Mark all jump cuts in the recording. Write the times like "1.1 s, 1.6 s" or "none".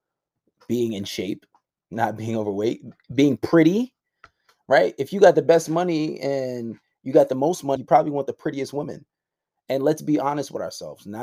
7.8 s